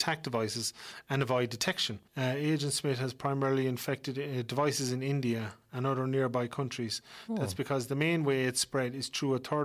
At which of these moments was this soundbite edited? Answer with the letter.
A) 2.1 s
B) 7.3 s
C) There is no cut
A